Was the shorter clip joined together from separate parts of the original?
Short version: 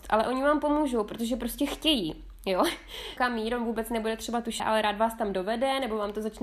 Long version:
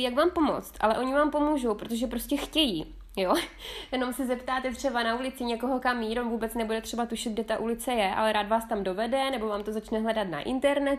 yes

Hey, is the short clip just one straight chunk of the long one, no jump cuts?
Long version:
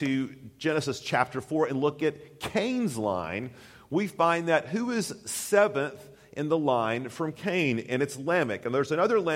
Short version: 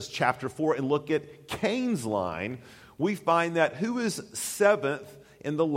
yes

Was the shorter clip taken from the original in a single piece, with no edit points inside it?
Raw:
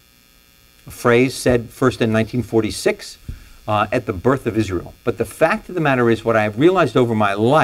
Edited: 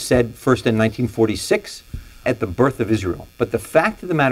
no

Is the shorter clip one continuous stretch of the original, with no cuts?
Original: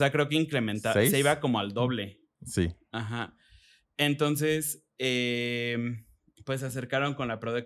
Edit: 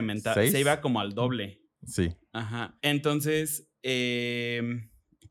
no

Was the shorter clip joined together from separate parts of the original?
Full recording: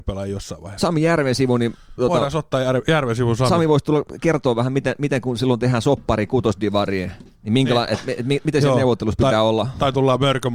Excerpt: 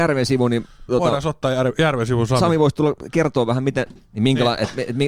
yes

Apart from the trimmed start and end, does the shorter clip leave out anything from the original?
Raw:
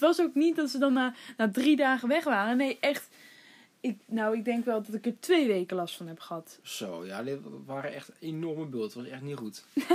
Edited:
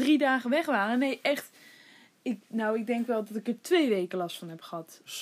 no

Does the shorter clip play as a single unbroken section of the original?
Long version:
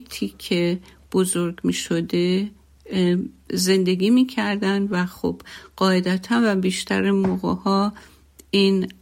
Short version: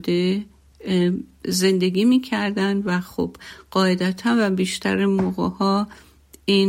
yes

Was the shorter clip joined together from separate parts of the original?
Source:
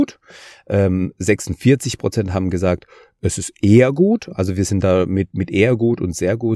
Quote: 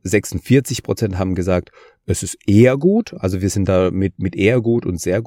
no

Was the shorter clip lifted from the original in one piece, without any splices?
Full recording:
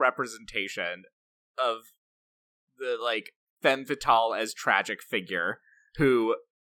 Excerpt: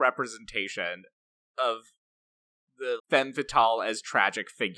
no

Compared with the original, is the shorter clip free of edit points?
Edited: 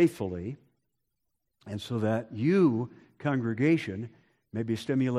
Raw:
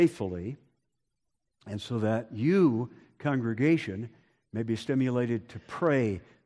yes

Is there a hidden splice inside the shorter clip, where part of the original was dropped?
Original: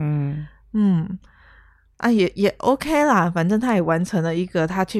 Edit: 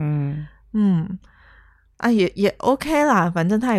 no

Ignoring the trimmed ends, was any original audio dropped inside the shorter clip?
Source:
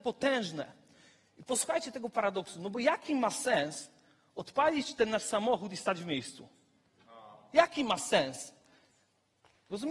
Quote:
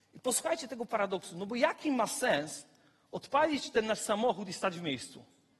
no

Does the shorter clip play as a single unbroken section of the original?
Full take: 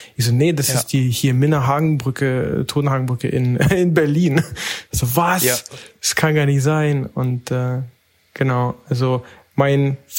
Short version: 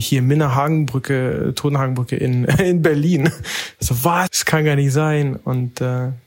no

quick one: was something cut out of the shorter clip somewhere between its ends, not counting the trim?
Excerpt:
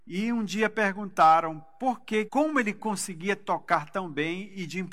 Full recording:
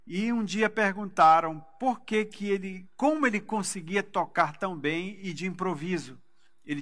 yes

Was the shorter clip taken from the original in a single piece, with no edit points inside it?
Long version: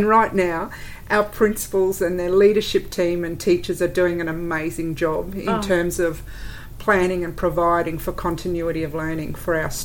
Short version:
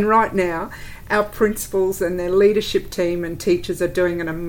yes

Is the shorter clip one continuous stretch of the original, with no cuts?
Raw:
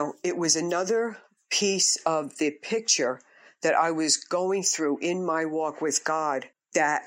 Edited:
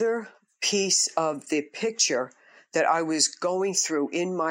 yes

